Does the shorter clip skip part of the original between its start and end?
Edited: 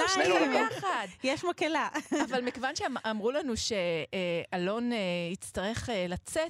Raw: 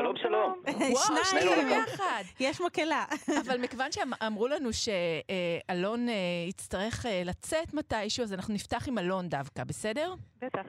no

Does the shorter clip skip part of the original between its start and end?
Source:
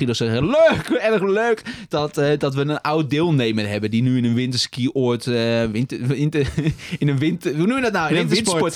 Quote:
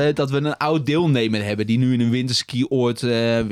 no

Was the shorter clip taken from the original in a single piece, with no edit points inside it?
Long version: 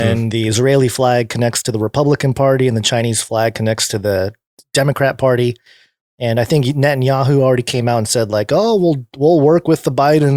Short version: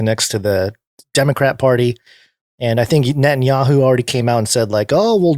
yes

